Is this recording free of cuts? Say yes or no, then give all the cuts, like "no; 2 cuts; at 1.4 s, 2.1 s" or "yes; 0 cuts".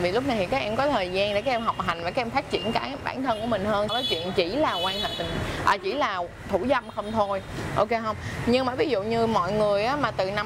no; 1 cut; at 3.9 s